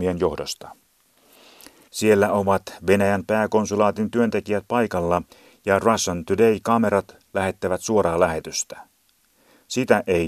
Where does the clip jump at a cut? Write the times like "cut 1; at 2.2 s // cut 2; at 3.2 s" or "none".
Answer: cut 1; at 1.9 s